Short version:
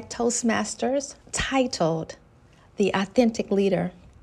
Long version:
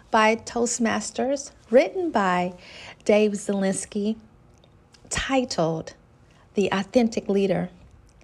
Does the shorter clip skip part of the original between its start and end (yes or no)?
yes